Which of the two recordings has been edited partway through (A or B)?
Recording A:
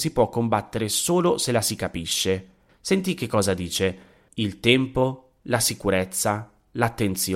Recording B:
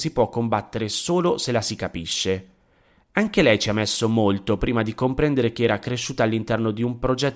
A